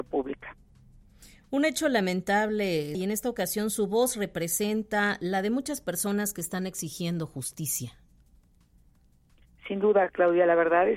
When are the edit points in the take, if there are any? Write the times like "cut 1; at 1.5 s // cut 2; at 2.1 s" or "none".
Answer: cut 1; at 2.9 s

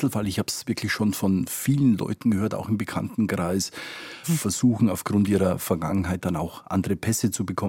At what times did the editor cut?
cut 1; at 4.2 s

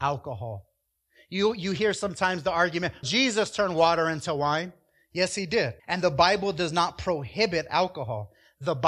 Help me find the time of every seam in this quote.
cut 1; at 3.0 s // cut 2; at 5.8 s

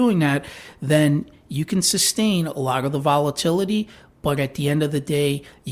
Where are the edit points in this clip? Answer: none

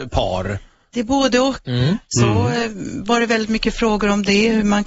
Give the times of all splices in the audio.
cut 1; at 1.6 s

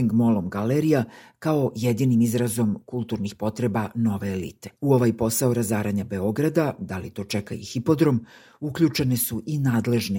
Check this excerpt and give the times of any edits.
cut 1; at 4.8 s

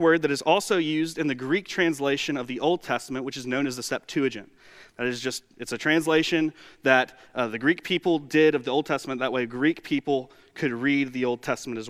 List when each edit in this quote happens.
none

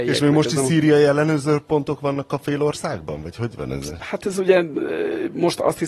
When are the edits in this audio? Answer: none

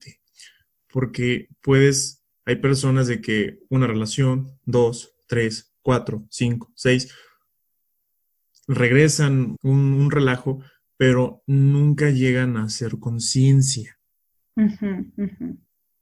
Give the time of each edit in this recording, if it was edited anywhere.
cut 1; at 9.5 s

